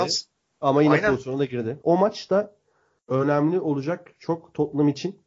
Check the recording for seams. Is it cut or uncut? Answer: cut